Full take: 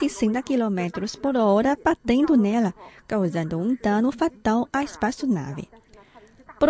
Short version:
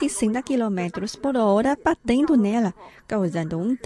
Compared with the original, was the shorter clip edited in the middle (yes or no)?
no